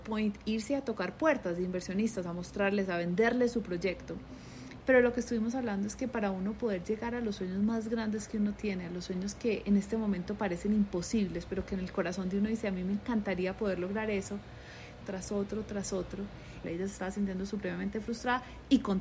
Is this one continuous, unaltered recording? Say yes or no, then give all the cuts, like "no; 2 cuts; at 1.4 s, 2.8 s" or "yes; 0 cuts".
no; 3 cuts; at 4.8 s, 15.0 s, 16.6 s